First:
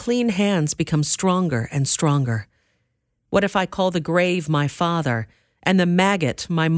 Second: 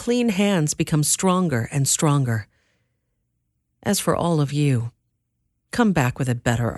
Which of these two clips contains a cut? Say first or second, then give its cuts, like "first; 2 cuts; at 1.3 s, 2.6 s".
first; 1 cut; at 3.2 s